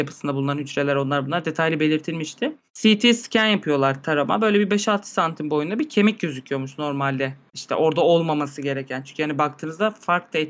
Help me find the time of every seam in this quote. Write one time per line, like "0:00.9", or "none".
none